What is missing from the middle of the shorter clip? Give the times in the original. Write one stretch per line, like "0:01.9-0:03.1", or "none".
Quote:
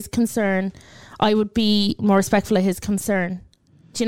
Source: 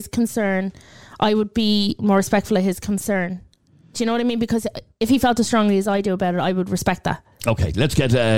none